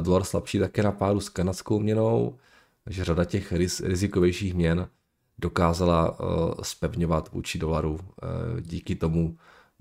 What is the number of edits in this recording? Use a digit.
0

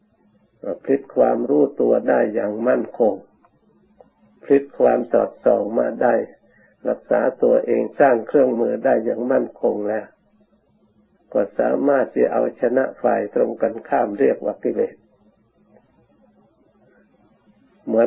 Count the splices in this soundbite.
0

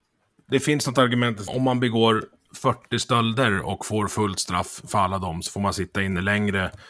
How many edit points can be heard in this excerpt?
1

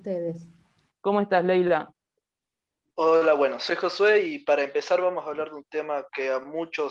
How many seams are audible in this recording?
2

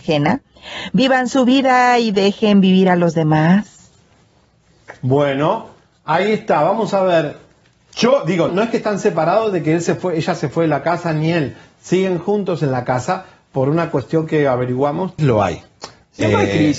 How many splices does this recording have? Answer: 2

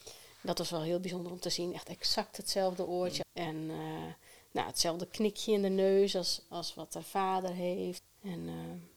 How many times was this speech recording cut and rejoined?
2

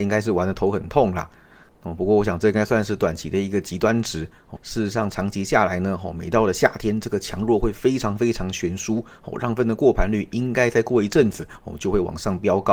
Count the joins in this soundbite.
1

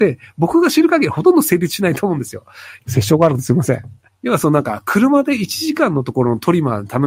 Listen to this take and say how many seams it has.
2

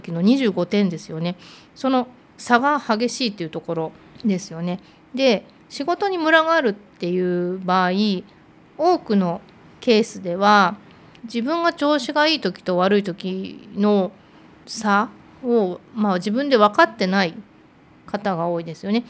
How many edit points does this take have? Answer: 0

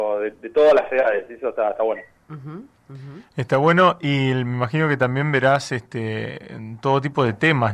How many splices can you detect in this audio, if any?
0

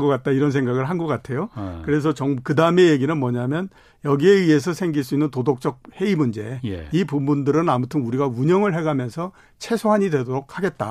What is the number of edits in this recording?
0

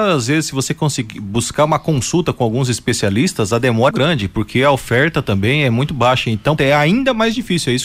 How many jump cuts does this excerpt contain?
2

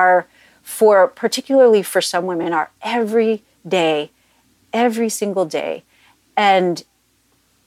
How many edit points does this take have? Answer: 0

